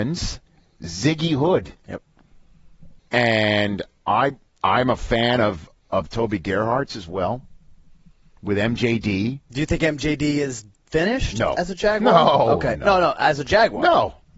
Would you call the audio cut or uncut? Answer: cut